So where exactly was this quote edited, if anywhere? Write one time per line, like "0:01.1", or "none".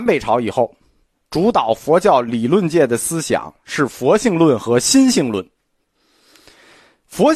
none